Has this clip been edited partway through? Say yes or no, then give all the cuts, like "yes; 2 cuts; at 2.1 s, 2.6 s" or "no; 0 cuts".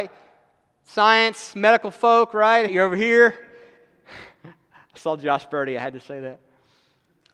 yes; 1 cut; at 2.7 s